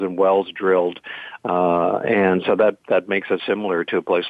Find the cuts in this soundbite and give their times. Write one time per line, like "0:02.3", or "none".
0:01.4
0:03.4